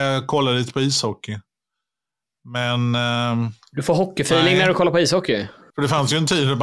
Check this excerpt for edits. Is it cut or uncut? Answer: cut